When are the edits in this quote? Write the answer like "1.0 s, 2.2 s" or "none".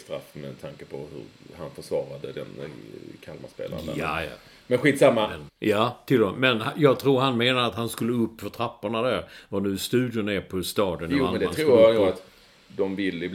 5.5 s